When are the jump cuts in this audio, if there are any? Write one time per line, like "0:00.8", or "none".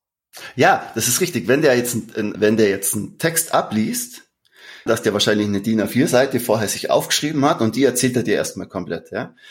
0:02.3
0:04.9